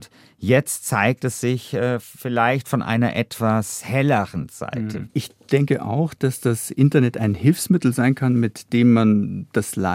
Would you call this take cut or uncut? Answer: cut